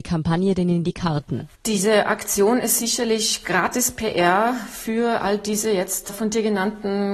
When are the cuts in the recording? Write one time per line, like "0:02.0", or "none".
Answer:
0:01.5